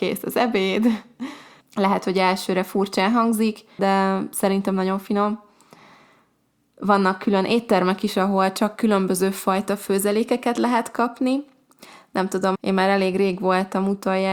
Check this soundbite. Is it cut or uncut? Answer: cut